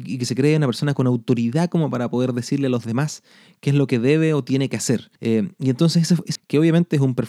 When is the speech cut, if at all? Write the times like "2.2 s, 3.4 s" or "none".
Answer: 5.2 s, 6.4 s